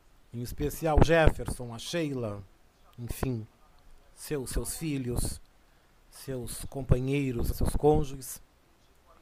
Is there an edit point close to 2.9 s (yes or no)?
no